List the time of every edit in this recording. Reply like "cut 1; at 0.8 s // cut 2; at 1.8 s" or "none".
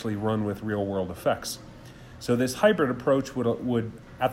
none